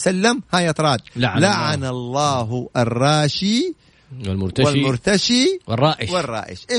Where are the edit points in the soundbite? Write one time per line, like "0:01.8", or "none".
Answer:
none

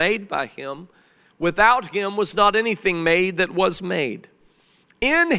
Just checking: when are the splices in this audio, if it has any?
none

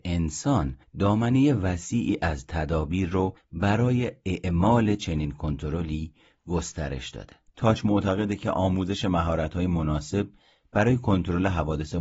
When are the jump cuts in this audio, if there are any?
0:07.5

